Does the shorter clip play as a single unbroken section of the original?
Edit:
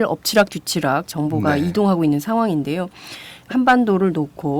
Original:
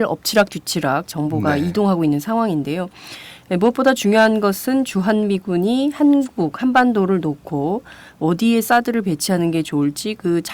no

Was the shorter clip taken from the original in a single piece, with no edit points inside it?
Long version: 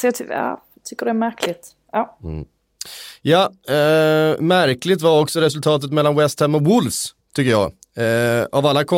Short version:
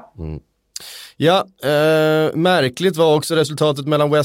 yes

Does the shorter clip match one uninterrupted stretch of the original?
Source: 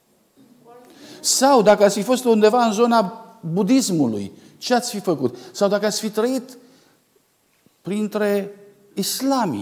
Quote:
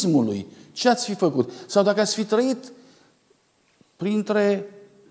yes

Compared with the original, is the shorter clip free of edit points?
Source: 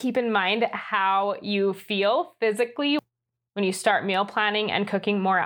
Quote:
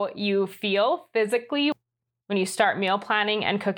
yes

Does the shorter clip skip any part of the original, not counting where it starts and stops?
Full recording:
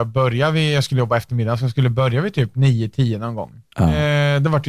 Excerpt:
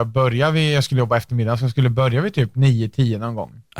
no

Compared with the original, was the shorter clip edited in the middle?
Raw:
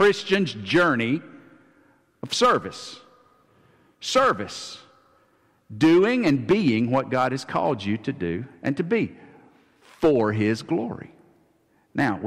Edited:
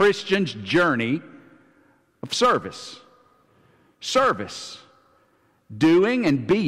no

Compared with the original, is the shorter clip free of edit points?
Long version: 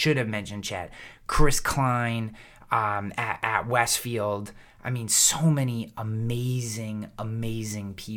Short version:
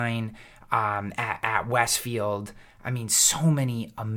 yes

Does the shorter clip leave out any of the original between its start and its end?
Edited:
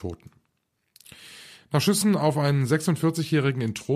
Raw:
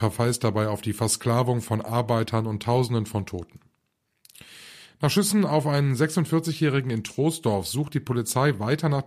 no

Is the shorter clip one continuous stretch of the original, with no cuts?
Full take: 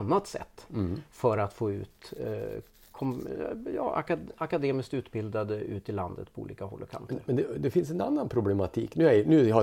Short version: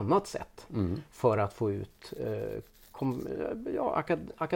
yes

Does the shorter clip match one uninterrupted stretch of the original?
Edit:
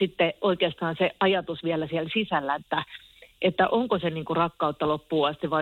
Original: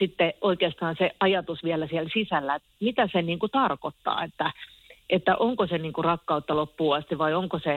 no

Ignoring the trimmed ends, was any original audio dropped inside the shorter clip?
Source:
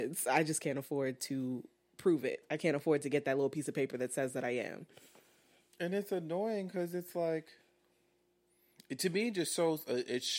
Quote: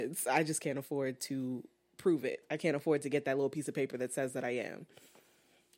no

